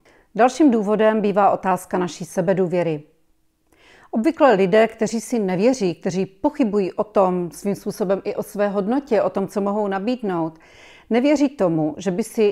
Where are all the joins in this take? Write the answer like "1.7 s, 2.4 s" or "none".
none